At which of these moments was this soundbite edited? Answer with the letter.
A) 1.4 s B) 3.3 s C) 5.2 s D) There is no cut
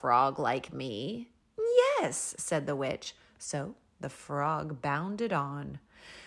D